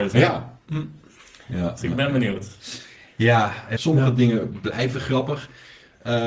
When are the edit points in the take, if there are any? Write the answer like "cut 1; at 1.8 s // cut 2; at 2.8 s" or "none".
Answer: cut 1; at 3.8 s